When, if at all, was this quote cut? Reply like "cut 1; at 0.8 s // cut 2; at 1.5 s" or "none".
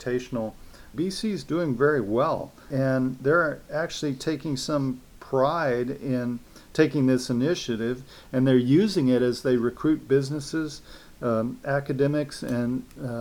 cut 1; at 0.9 s